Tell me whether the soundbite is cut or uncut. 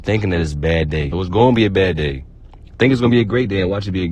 cut